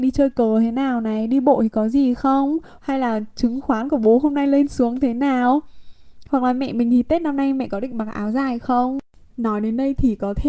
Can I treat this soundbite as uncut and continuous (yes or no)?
no